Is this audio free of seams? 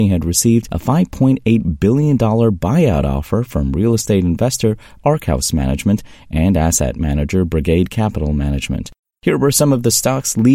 no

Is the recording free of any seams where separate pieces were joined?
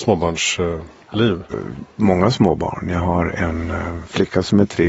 no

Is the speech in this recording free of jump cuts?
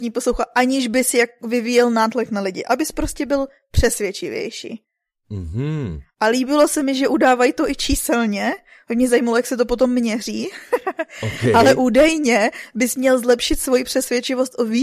yes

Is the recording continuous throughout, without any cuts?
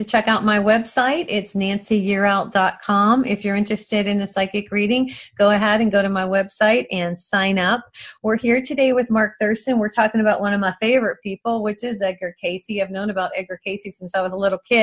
yes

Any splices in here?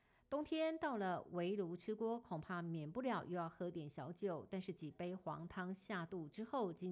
no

